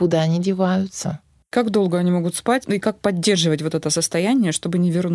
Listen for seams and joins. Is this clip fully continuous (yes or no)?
yes